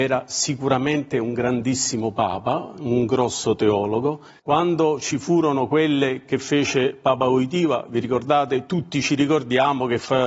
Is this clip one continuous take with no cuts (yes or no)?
no